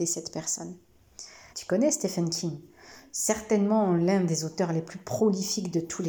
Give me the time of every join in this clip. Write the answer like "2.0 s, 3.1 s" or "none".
1.5 s